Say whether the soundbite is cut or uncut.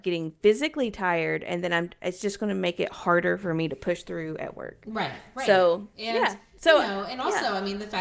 uncut